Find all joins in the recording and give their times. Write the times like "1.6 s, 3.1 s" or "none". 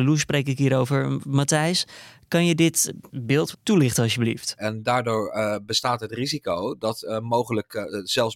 3.5 s, 4.6 s